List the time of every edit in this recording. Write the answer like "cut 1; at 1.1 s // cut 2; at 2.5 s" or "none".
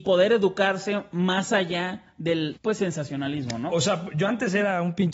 cut 1; at 2.6 s // cut 2; at 3.7 s